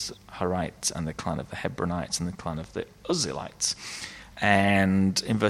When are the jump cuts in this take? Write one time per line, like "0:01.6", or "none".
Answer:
0:04.3

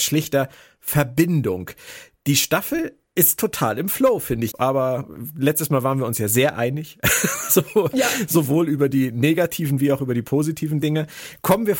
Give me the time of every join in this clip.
0:04.5

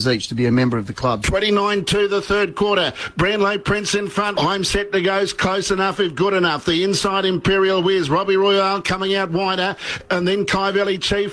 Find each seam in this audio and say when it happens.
0:01.2
0:04.3

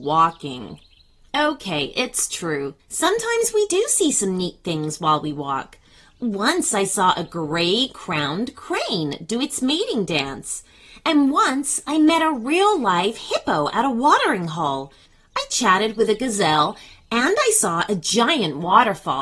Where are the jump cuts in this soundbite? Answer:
none

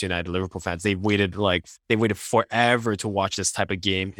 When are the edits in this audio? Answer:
0:01.8

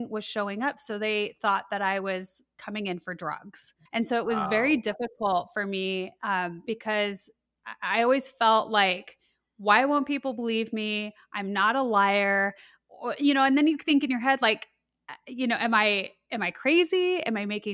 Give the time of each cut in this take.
0:03.9

